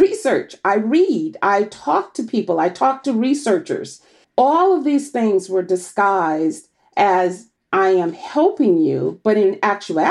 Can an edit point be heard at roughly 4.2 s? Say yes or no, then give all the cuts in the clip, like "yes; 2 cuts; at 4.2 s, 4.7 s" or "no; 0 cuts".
yes; 1 cut; at 4.2 s